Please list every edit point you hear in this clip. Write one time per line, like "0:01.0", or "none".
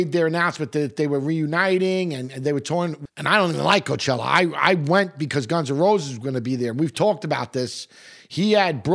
0:03.1